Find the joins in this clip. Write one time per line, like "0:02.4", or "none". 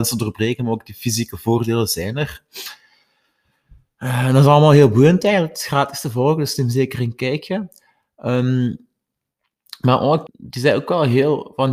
0:10.3